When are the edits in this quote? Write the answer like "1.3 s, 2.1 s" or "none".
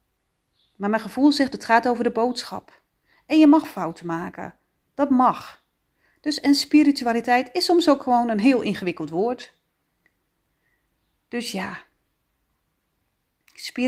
1.5 s